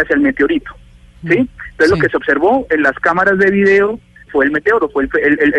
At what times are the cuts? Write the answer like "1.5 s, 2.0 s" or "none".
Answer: 4.3 s